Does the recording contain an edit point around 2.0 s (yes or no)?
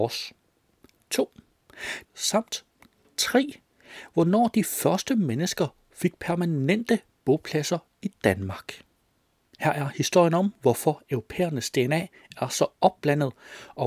yes